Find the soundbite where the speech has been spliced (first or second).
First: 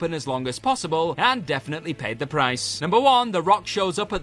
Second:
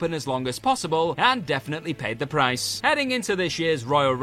second